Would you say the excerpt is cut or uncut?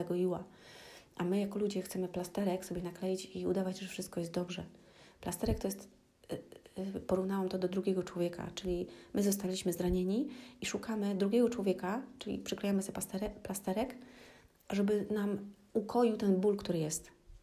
uncut